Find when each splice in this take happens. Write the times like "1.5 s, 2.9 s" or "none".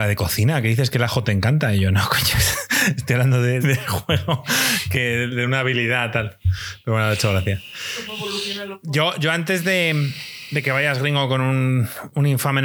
3.6 s